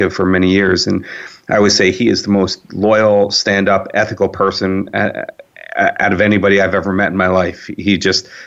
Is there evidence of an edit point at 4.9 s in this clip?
no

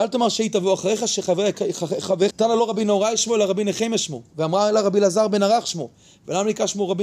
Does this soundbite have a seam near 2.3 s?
yes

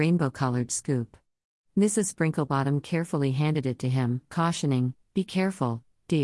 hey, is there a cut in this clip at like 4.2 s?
no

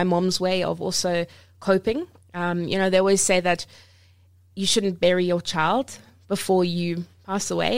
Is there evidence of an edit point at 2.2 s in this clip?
no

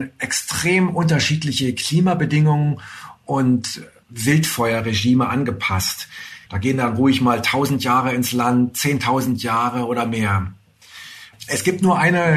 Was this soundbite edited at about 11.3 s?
yes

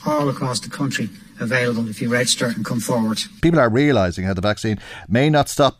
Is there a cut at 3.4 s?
yes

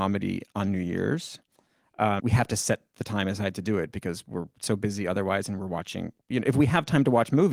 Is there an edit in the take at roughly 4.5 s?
no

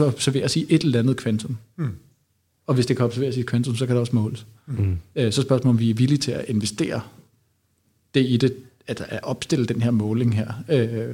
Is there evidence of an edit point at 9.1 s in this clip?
no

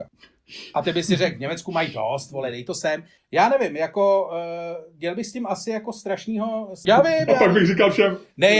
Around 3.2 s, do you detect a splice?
yes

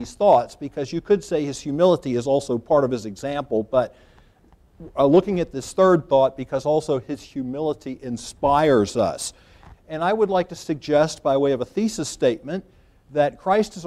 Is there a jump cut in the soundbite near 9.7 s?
yes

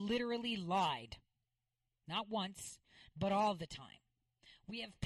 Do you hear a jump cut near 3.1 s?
yes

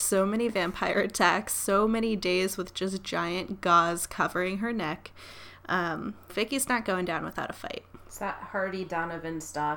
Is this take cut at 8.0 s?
no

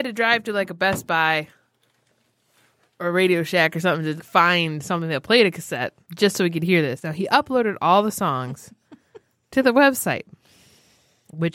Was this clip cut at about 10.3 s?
no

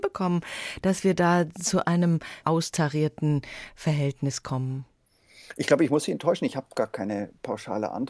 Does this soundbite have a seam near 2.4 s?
yes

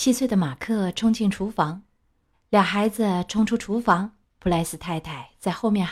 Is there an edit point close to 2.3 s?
yes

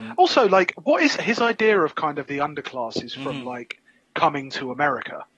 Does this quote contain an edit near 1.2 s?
yes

